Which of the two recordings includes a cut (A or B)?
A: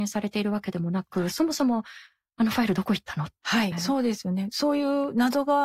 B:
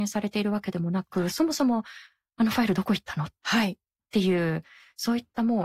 A